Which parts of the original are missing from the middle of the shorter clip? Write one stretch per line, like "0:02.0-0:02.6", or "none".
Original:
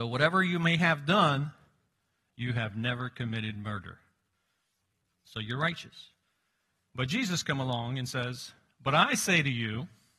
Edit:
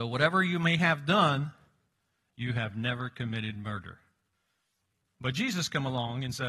0:05.1-0:06.8